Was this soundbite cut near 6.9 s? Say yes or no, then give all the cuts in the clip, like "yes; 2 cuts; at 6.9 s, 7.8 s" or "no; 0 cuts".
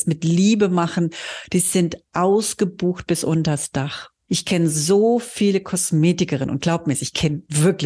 no; 1 cut; at 4.3 s